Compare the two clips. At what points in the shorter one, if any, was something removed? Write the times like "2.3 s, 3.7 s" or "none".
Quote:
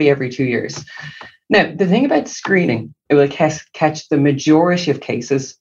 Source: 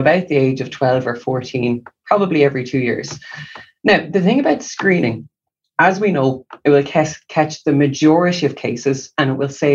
3.1 s